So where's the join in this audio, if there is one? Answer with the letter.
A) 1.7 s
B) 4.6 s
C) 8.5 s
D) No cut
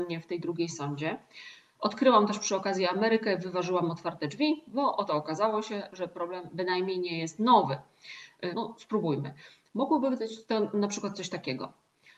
C